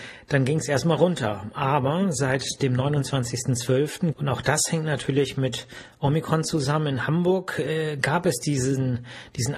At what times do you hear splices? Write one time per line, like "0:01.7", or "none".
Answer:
0:04.1